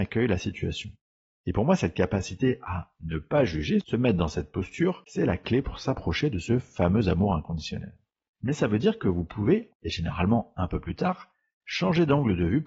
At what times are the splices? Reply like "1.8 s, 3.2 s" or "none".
8.3 s, 9.7 s